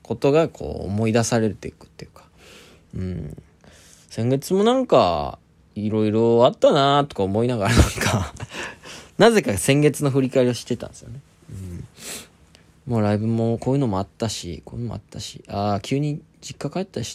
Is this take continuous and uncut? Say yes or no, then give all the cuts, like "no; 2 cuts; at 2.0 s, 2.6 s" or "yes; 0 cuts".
yes; 0 cuts